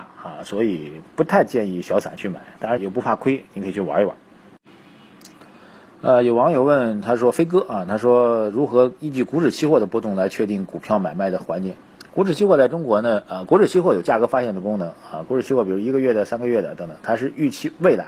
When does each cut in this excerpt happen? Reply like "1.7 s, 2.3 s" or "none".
2.8 s